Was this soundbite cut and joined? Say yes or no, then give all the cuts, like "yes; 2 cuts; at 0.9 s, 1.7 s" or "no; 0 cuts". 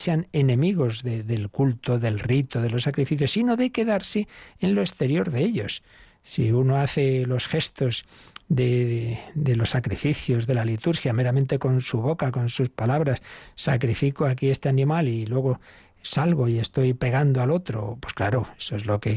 no; 0 cuts